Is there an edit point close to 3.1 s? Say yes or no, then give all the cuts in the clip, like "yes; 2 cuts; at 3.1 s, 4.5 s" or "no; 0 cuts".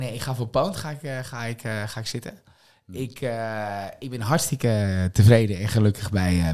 no; 0 cuts